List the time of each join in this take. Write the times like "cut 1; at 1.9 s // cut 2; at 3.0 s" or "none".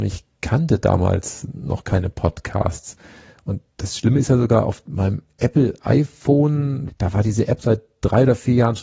cut 1; at 6.9 s